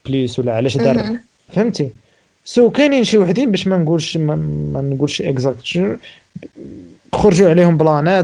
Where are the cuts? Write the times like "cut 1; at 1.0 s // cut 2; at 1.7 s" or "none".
cut 1; at 1.5 s

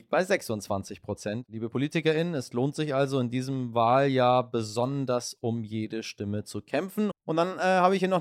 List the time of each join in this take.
cut 1; at 7.1 s

